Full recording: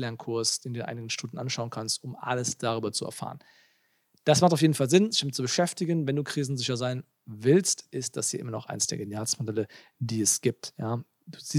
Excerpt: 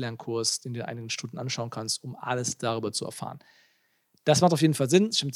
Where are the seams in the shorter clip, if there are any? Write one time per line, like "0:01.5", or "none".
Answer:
none